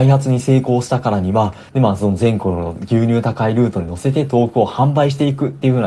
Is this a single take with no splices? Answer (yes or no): no